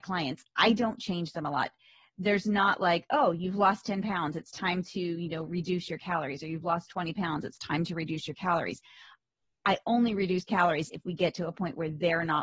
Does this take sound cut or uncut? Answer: uncut